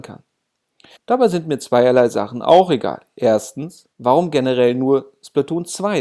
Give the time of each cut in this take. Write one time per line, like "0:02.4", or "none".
0:01.0
0:03.9

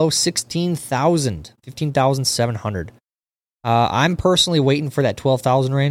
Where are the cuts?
0:01.6

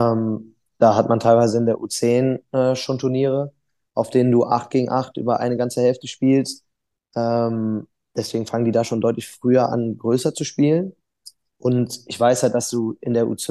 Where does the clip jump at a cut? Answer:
none

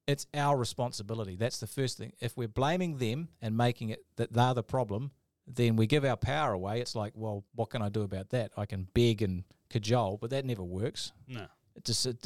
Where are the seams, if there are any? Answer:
none

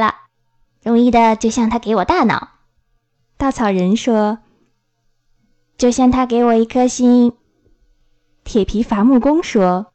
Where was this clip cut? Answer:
none

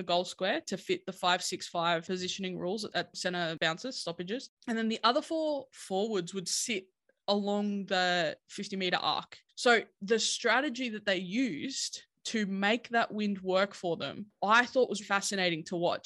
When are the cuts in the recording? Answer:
0:09.5
0:15.0

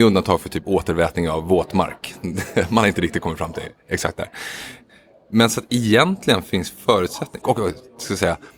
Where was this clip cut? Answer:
0:07.4

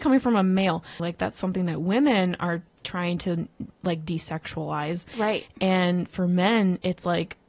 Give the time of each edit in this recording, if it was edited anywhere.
0:01.0

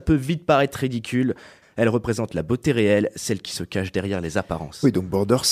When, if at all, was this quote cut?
0:01.6

